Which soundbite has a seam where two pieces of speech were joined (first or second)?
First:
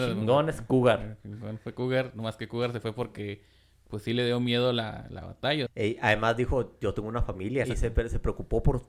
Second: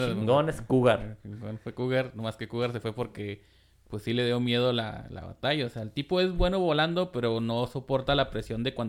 first